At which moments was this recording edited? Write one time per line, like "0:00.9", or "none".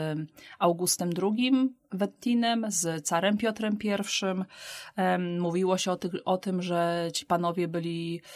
none